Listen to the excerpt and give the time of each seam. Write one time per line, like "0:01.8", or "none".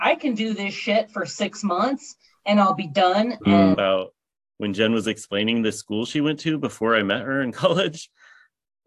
0:03.7